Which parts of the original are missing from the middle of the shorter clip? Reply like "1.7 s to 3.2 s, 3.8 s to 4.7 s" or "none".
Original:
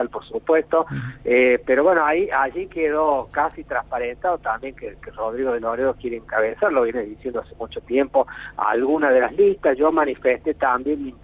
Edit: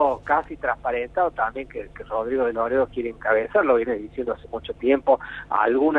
none

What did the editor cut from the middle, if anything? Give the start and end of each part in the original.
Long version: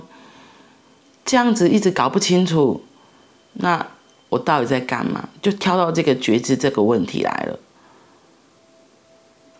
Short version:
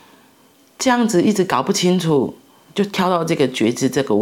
3.1 s to 5.4 s

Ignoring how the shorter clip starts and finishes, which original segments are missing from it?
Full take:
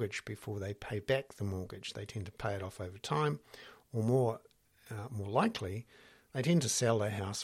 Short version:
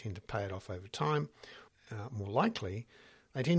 3.8 s to 4.7 s

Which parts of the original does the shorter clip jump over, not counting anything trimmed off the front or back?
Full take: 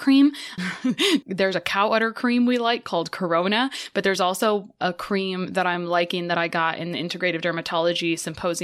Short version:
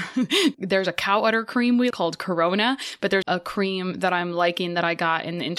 2.6 s to 2.8 s, 4.2 s to 4.8 s

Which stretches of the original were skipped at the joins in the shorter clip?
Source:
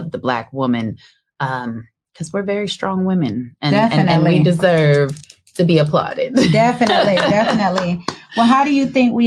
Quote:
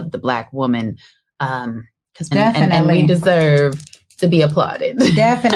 2.3 s to 3.7 s

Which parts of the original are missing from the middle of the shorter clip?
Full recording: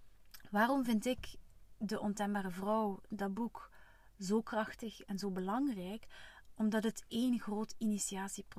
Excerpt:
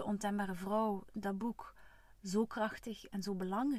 none

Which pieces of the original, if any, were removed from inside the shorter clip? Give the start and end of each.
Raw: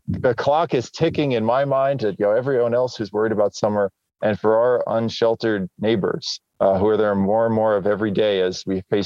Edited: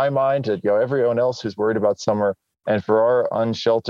none

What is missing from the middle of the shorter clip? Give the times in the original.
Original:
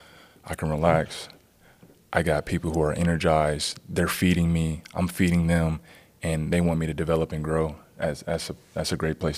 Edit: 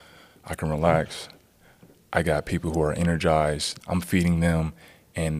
3.8 s to 4.9 s

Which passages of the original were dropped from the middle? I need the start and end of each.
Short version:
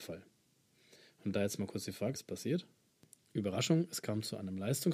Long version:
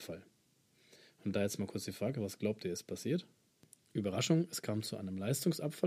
2.1 s to 2.7 s

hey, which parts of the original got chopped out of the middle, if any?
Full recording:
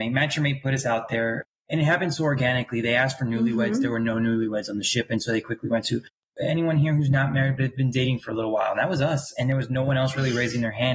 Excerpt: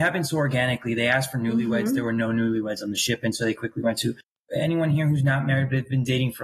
none

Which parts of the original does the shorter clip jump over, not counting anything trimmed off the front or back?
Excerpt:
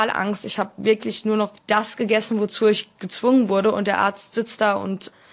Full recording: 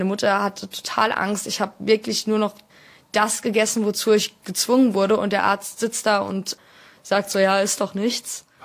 2.6 s to 3.0 s

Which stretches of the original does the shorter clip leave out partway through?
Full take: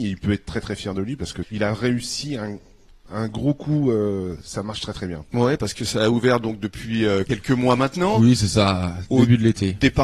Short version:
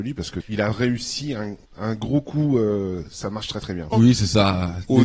2.7 s to 3.0 s, 5.2 s to 8.1 s

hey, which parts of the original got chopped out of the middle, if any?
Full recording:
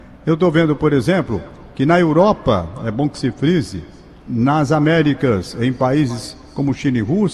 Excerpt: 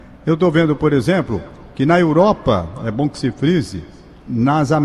none

